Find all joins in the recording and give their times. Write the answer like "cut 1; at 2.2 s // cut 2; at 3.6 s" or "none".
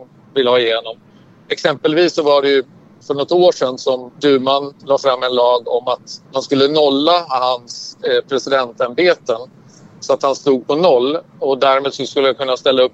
cut 1; at 4.1 s // cut 2; at 6.3 s